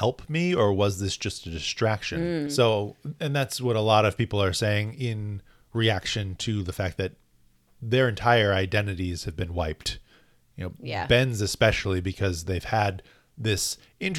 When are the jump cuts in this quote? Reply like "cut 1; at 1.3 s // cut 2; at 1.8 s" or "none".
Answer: cut 1; at 2.5 s